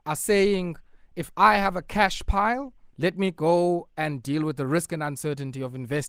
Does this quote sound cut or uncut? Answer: cut